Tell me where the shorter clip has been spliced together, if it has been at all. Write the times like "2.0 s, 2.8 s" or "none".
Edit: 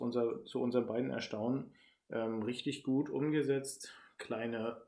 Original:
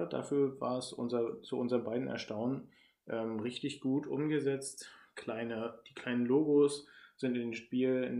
none